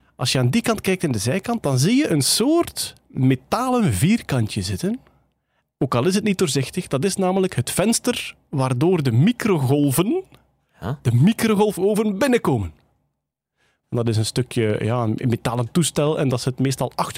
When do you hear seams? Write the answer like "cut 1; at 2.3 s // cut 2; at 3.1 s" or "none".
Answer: cut 1; at 5.7 s // cut 2; at 13.8 s